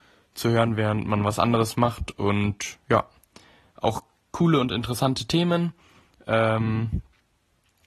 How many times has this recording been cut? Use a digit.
0